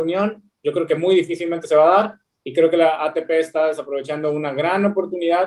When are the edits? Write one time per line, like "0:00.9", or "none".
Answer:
none